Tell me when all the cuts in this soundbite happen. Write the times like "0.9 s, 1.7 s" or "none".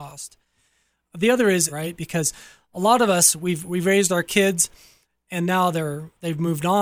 1.7 s